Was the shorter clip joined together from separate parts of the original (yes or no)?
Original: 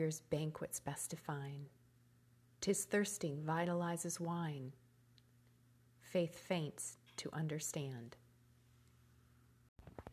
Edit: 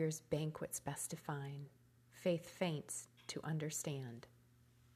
yes